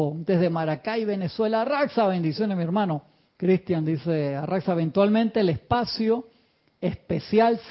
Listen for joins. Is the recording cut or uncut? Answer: uncut